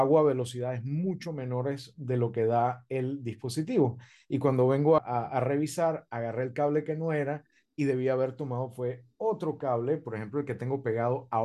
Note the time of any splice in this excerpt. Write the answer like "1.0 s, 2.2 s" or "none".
5.0 s